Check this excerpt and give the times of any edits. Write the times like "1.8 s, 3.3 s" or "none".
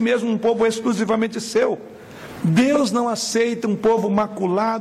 2.4 s